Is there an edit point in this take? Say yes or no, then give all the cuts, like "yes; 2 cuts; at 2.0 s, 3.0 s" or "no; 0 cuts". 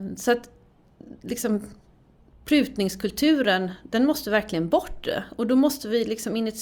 no; 0 cuts